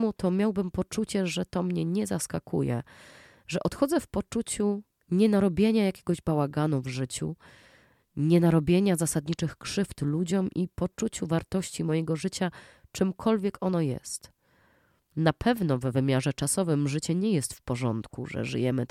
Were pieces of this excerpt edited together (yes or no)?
no